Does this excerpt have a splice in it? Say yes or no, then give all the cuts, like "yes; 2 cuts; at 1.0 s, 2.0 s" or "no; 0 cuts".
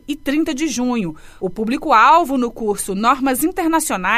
yes; 1 cut; at 1.4 s